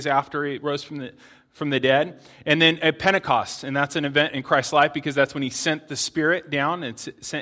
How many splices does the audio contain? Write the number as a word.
zero